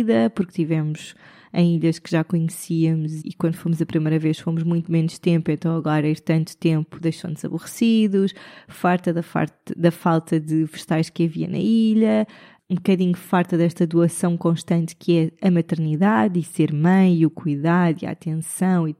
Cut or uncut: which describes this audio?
cut